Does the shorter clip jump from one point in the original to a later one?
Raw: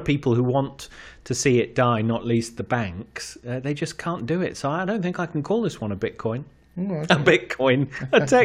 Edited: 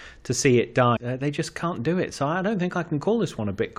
yes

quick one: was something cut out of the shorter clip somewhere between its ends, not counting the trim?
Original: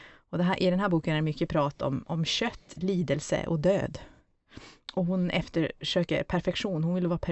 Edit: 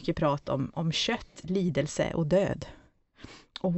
no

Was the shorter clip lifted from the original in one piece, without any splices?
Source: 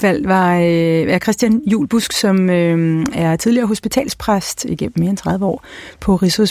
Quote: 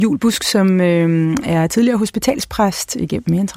yes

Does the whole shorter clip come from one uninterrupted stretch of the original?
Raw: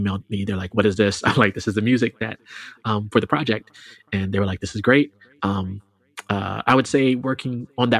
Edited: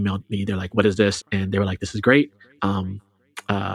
no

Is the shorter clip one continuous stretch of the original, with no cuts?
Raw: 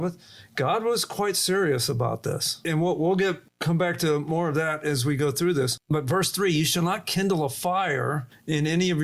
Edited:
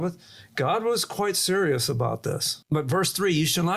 no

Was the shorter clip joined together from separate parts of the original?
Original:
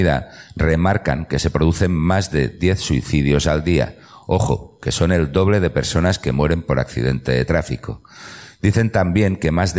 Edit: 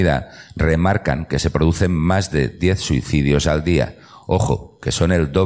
no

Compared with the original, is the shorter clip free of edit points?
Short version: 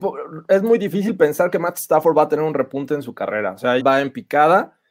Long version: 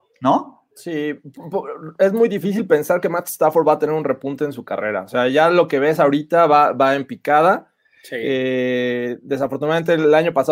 no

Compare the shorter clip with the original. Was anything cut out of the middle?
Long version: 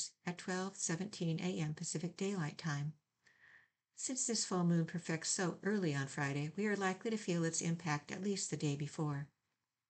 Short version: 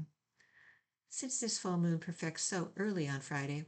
no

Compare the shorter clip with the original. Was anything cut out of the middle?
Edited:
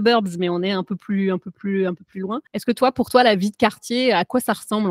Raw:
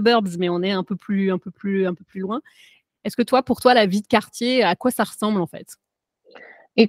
yes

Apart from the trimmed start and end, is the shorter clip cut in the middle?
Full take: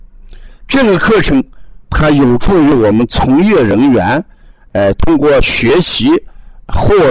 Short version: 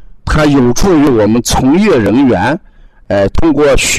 no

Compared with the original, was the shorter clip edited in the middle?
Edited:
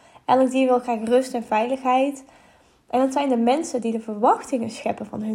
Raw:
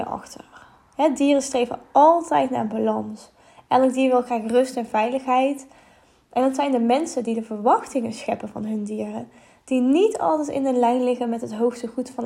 no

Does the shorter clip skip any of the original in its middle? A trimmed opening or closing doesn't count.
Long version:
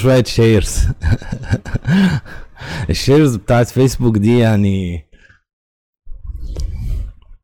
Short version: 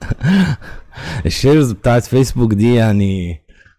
no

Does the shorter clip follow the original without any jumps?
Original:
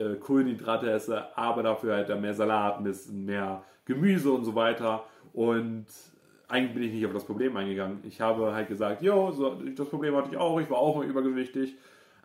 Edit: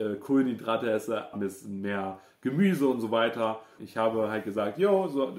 no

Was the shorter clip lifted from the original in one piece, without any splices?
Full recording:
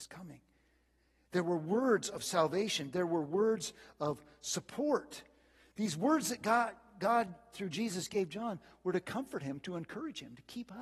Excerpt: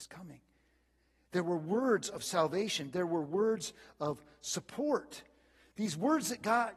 yes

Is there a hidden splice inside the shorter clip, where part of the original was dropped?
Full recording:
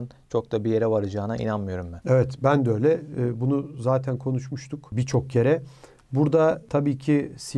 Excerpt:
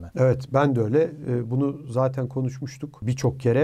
no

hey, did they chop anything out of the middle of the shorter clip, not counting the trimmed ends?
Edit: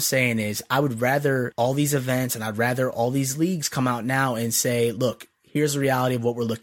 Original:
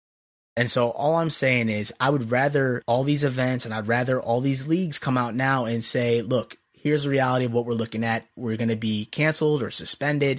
no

